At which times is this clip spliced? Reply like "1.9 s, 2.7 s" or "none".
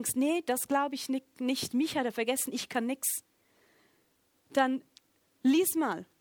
none